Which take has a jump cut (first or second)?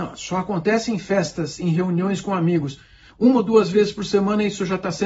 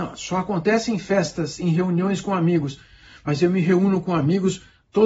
first